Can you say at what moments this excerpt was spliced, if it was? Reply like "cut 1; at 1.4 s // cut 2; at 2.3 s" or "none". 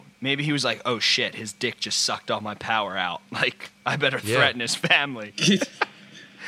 none